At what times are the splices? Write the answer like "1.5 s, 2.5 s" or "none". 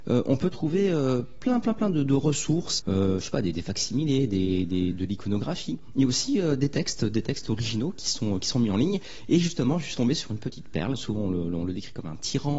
2.8 s, 10.9 s